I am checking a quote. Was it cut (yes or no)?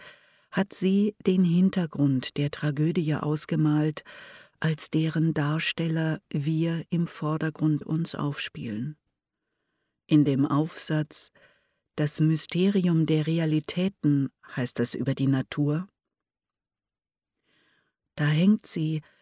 yes